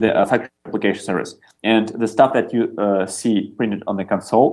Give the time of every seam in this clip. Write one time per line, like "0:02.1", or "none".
none